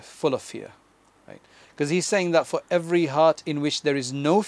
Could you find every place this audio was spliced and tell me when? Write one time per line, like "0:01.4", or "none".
none